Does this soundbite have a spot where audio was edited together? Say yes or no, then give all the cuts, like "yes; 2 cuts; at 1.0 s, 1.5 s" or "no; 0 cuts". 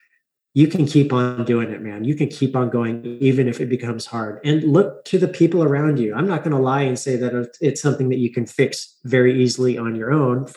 no; 0 cuts